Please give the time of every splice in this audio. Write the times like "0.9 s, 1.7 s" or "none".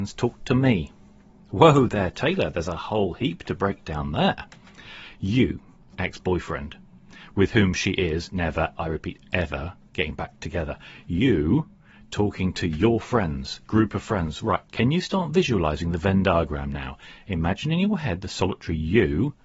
5.9 s, 8.8 s